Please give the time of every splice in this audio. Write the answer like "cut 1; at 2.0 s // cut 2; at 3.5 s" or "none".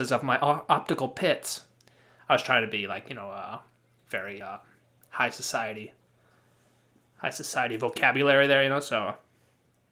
none